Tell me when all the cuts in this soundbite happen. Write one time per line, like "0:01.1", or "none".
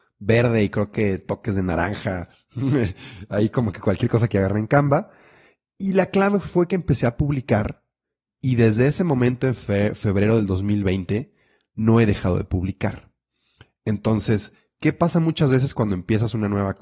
none